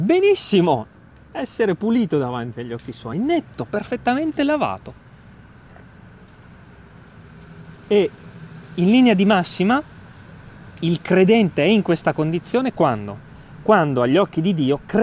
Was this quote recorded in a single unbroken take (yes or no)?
yes